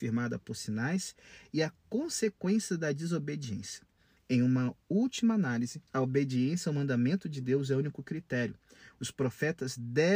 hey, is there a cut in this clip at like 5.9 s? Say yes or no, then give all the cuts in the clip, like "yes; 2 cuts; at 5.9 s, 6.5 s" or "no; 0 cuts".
yes; 2 cuts; at 4.2 s, 5.9 s